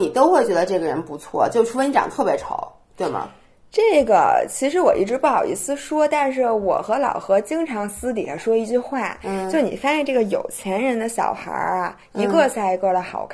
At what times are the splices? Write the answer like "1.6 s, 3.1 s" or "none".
none